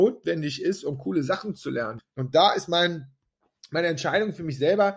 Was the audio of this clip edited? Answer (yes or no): yes